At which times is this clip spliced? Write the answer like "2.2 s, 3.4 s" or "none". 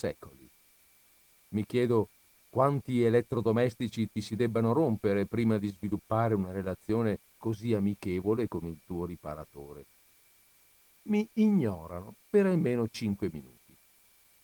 none